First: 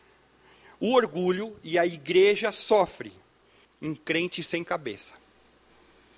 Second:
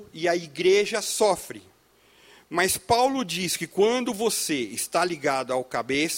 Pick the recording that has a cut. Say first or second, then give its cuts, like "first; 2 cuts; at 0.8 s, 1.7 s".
first; 1 cut; at 3.6 s